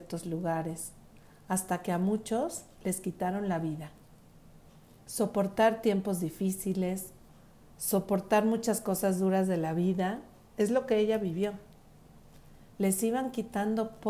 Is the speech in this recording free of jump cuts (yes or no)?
no